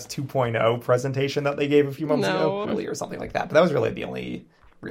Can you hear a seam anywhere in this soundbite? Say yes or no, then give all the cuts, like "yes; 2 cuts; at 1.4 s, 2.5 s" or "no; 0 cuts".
yes; 1 cut; at 2.6 s